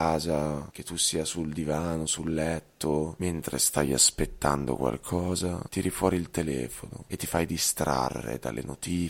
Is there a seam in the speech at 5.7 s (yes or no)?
no